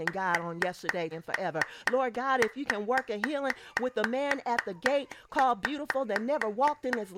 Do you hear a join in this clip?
yes; 1 cut; at 1.1 s

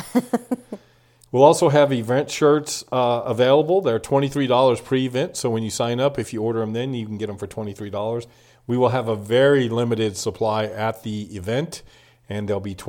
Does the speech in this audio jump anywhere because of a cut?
no; 0 cuts

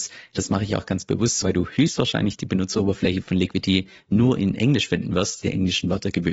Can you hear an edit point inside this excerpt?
yes; 2 cuts; at 1.4 s, 5.4 s

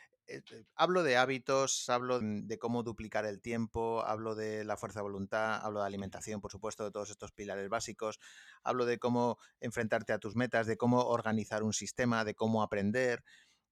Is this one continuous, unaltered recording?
no; 1 cut; at 2.2 s

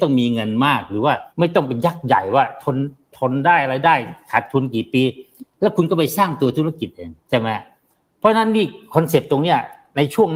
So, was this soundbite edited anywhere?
yes; 2 cuts; at 1.3 s, 7.2 s

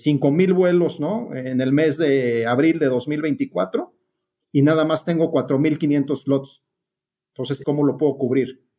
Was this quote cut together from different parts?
yes; 1 cut; at 7.6 s

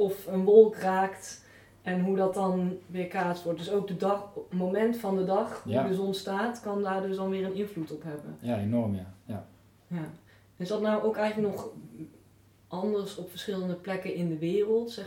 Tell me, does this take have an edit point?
no; 0 cuts

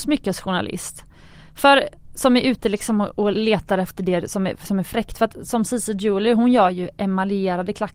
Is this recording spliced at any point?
no; 0 cuts

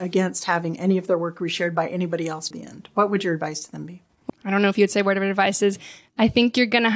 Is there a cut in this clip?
yes; 2 cuts; at 2.5 s, 4.3 s

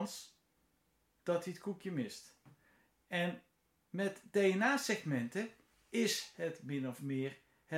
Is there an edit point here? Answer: no; 0 cuts

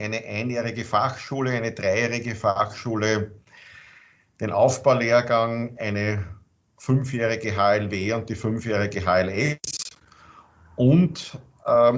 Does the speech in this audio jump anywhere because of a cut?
no; 0 cuts

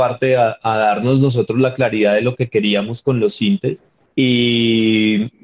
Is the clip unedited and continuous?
no; 1 cut; at 4.1 s

